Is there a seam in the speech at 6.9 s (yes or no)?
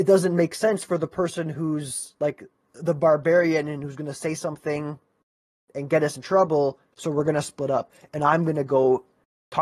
yes